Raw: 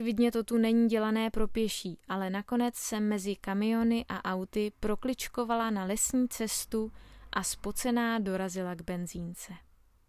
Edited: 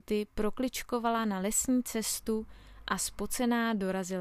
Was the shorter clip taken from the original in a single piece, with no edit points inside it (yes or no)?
yes